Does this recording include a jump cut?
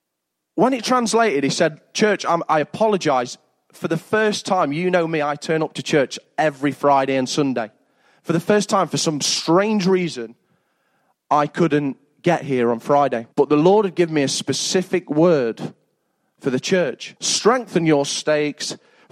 yes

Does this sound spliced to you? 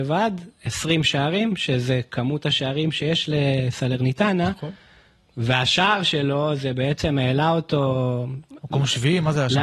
no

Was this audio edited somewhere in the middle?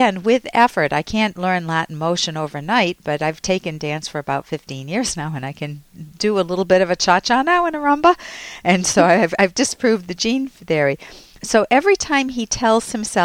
no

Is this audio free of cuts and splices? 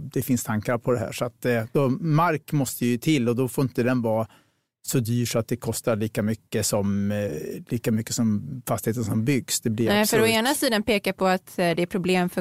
yes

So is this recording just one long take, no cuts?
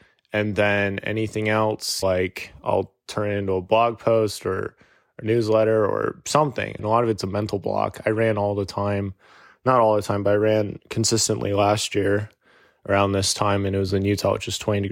no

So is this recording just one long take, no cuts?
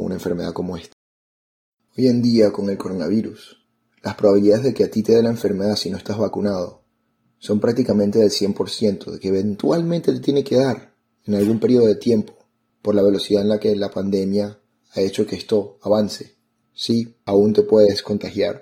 no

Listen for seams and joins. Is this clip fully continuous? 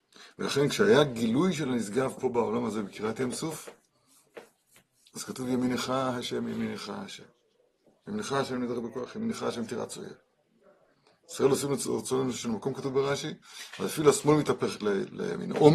yes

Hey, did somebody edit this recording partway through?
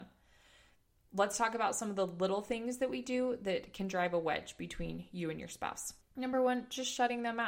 no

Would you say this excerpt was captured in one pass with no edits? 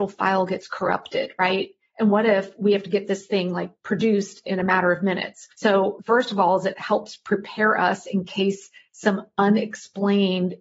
no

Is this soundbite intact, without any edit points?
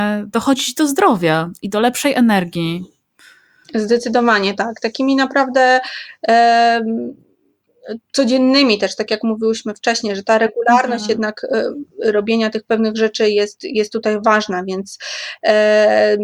no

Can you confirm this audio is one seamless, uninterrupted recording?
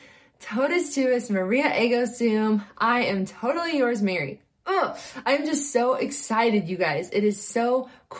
yes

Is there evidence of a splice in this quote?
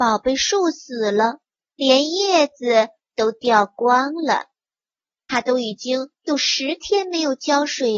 yes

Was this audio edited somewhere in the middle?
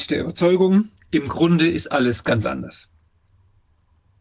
no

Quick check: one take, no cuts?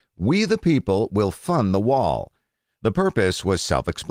yes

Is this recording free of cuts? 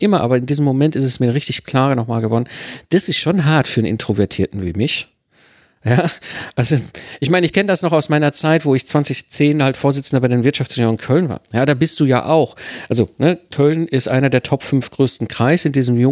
yes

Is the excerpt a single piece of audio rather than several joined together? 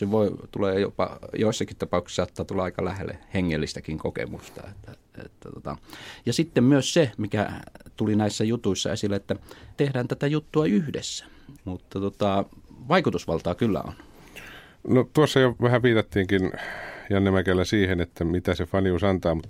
no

